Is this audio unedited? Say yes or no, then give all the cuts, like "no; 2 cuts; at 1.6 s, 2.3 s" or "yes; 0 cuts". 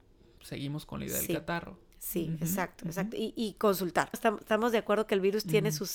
no; 1 cut; at 4.1 s